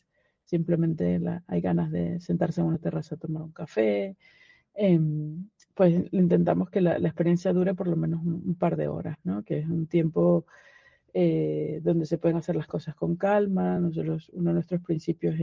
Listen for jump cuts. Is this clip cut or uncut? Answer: uncut